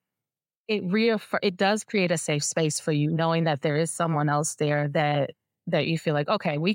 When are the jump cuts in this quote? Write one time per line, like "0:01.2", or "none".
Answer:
0:01.4

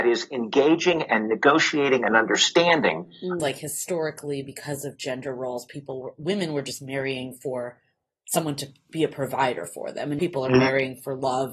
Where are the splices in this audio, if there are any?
0:03.4
0:10.2

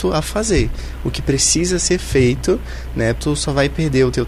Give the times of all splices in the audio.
0:03.2

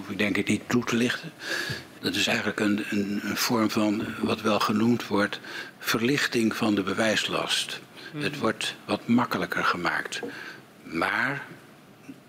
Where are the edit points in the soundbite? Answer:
0:02.0

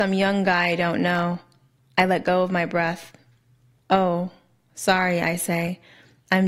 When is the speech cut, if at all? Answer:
0:03.7

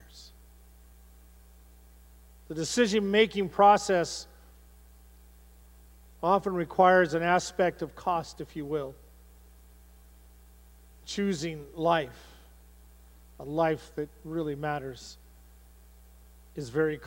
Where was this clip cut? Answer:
none

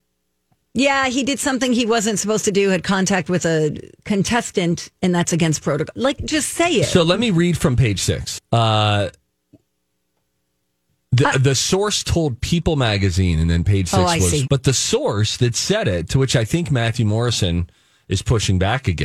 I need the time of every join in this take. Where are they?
0:06.2
0:08.4
0:14.5

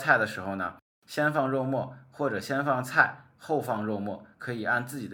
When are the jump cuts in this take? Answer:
none

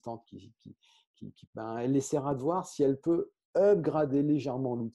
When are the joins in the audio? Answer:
0:01.5

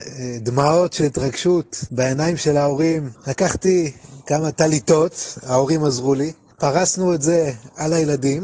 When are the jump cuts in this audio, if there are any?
0:03.2

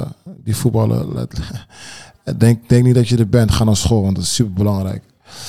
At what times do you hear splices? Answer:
none

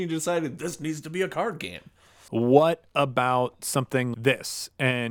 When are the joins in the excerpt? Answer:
0:02.3
0:04.1

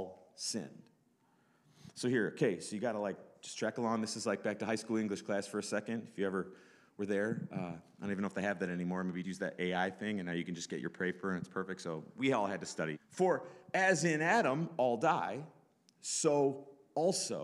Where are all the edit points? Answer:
0:09.2
0:12.9

